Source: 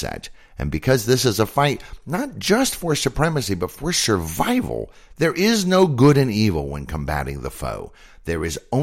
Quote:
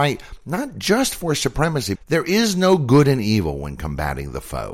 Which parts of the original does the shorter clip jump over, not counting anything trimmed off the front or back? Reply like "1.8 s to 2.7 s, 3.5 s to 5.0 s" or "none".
3.6 s to 5.0 s